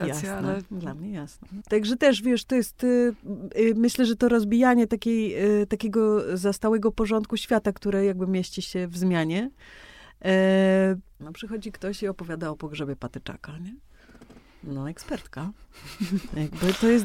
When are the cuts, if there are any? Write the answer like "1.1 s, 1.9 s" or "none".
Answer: 1.6 s, 11.2 s